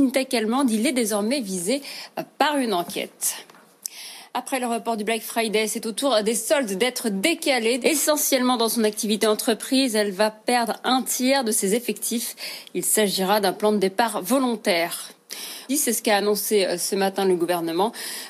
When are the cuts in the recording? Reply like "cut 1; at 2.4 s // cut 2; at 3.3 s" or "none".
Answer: cut 1; at 7.8 s // cut 2; at 15.7 s